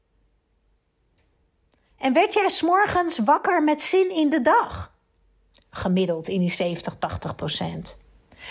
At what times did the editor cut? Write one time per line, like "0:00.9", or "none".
none